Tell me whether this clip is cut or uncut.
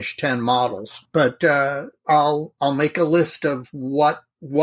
uncut